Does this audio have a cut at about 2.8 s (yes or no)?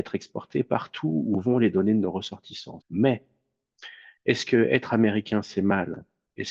yes